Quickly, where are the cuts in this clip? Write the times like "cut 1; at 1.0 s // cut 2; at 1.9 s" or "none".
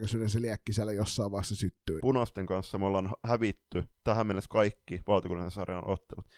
cut 1; at 2.0 s // cut 2; at 3.9 s